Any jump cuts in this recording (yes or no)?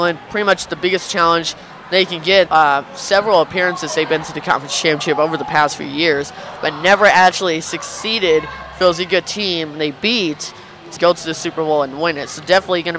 yes